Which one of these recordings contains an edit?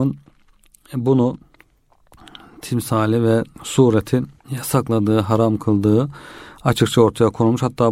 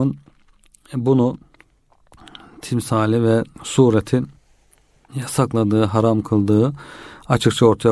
first; 1 cut; at 4.4 s

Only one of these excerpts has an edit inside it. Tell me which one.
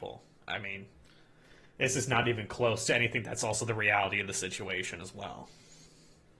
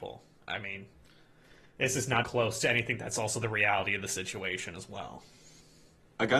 second; 1 cut; at 2.2 s

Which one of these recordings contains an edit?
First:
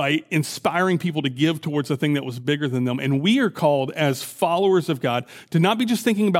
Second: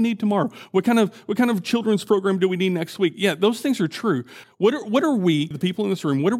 second; 2 cuts; at 4.4 s, 5.5 s

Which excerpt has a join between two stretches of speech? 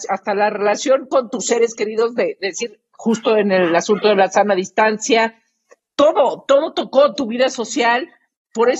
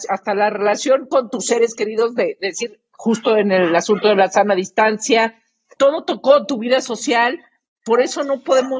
second; 1 cut; at 5.8 s

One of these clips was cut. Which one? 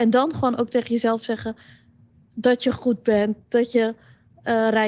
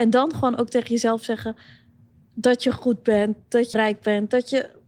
second; 1 cut; at 3.7 s

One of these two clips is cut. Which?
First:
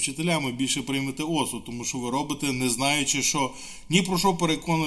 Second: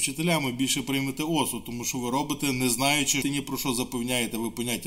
second; 1 cut; at 3.2 s

